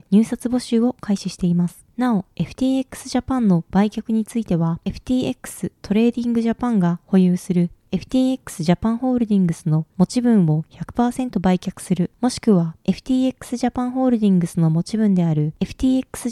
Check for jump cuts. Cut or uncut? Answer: uncut